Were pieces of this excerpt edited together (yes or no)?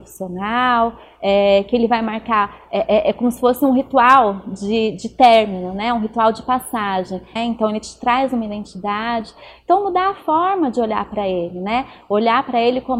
yes